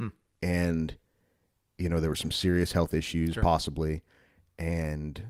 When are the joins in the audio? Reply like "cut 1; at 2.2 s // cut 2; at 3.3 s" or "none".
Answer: none